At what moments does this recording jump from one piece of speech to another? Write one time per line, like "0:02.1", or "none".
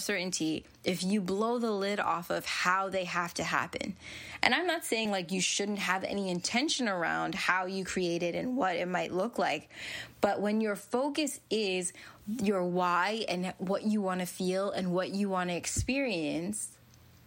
none